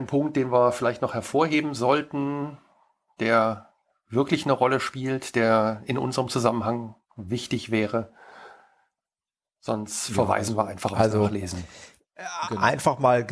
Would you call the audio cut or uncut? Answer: uncut